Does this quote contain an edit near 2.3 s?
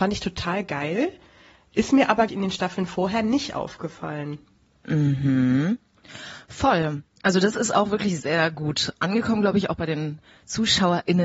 yes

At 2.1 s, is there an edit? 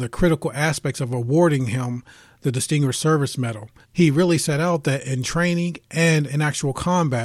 no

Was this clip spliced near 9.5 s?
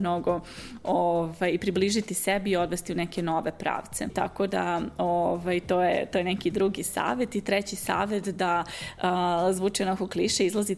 no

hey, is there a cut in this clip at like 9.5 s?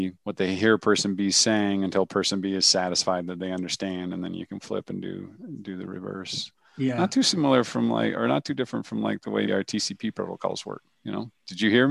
yes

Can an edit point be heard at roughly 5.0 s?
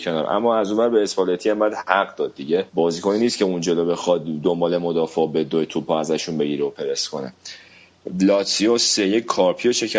no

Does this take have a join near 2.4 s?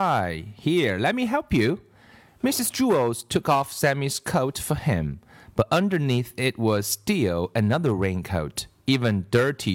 no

